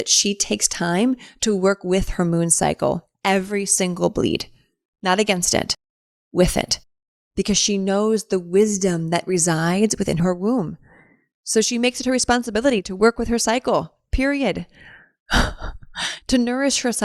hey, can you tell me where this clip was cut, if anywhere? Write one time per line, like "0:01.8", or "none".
none